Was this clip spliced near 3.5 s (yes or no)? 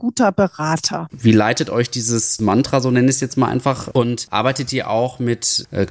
no